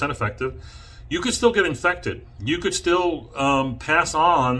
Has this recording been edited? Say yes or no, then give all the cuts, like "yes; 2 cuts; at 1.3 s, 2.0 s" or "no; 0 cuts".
no; 0 cuts